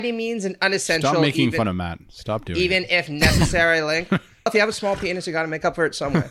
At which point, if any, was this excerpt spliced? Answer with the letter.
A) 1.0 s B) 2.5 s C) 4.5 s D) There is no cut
C